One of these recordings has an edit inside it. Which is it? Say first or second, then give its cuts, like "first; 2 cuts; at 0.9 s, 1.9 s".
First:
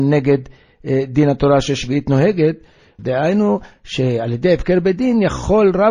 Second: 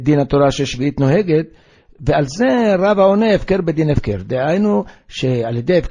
first; 1 cut; at 3.0 s